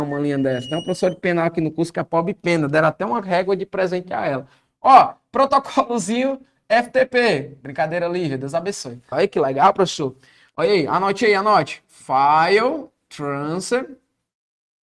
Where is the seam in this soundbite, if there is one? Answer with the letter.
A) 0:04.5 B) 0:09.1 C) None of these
B